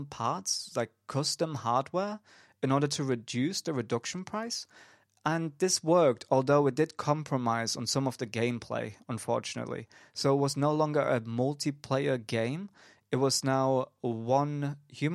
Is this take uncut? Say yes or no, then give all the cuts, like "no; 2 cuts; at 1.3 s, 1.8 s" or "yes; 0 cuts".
yes; 0 cuts